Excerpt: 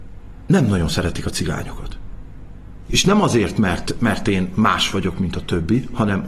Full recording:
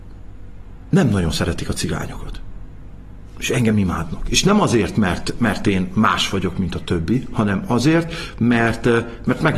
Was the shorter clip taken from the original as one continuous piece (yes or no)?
no